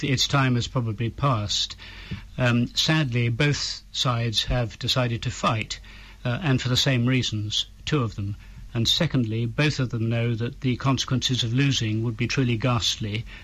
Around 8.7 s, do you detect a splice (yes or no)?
yes